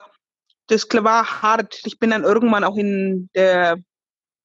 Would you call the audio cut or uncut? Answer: cut